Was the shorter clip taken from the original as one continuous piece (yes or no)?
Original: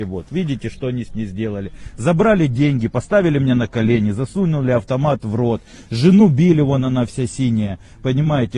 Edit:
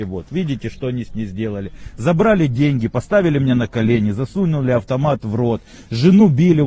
yes